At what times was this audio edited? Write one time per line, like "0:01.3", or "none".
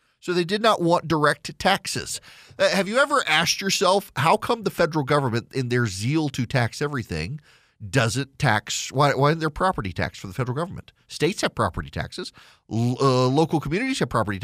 none